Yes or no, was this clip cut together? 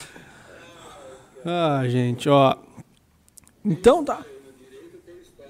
no